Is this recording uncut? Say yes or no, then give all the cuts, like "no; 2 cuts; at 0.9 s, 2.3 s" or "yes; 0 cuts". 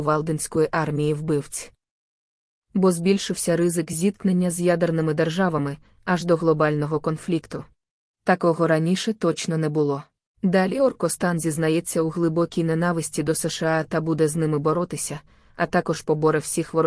no; 2 cuts; at 8.1 s, 10.3 s